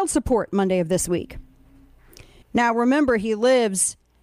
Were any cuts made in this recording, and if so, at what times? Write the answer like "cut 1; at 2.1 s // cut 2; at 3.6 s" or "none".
cut 1; at 2.4 s